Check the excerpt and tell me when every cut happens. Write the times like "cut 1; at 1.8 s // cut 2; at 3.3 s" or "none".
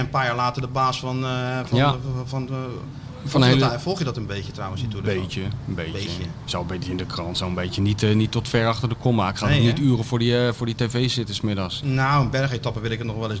cut 1; at 11.8 s

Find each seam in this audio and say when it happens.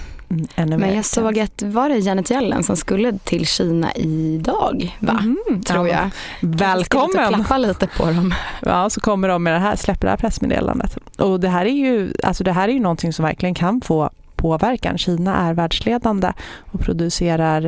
none

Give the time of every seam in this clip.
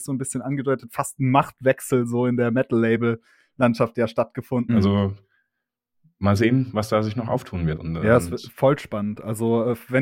cut 1; at 4.7 s // cut 2; at 7.8 s

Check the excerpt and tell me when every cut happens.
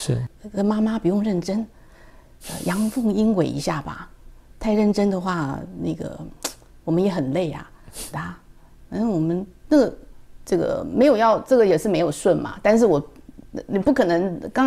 cut 1; at 8.1 s

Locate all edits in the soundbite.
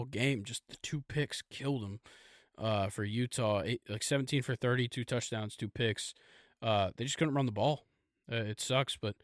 cut 1; at 4.9 s

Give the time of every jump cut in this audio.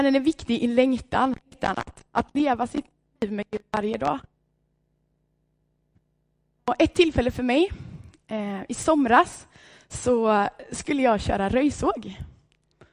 cut 1; at 1.4 s

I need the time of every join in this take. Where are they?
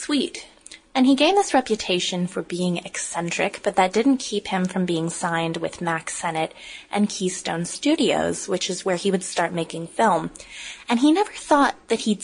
none

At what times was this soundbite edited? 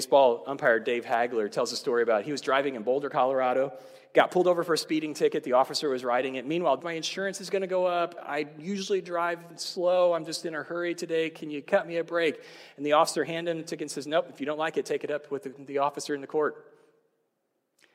cut 1; at 6.8 s

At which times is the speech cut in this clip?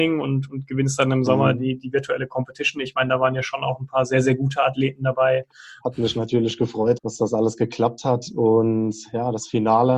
cut 1; at 5.8 s // cut 2; at 7.0 s

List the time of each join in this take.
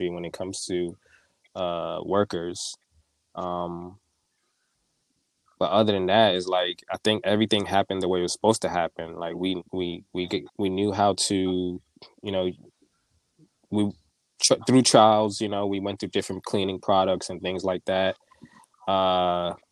cut 1; at 10.5 s

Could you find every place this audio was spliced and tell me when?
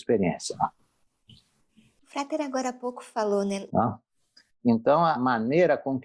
cut 1; at 3.7 s // cut 2; at 5.1 s

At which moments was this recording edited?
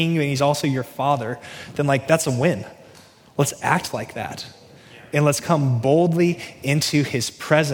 none

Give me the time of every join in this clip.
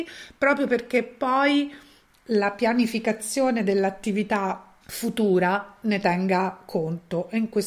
cut 1; at 4.8 s

